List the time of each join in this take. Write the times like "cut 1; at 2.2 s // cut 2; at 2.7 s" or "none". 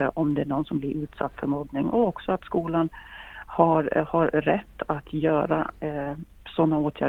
none